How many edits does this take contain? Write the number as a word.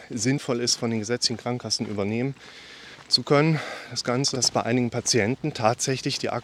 one